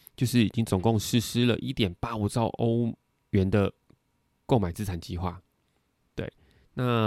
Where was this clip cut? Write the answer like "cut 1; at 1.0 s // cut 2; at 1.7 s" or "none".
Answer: none